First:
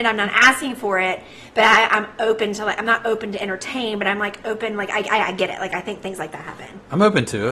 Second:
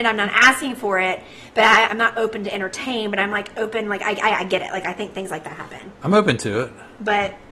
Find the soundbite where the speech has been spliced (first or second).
second